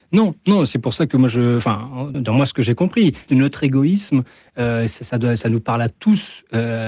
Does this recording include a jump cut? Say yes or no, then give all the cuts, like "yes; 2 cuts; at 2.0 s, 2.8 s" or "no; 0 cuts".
yes; 2 cuts; at 2.1 s, 3.3 s